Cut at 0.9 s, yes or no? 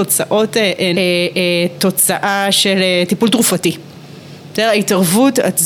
yes